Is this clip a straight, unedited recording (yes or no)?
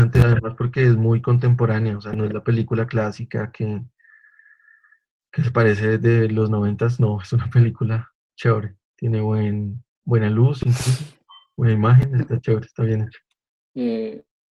yes